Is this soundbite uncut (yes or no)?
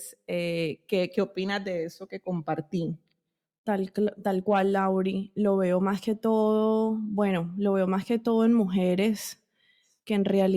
yes